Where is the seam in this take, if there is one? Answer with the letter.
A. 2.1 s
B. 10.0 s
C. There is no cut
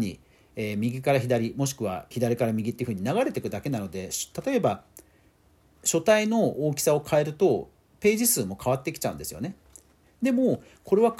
A